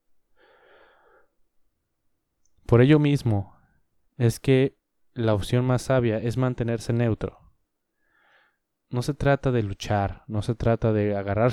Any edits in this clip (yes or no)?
no